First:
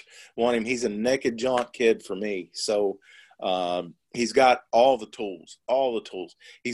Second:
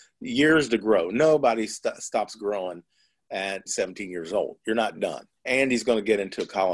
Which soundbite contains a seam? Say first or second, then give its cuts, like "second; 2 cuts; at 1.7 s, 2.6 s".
second; 2 cuts; at 3.7 s, 5.4 s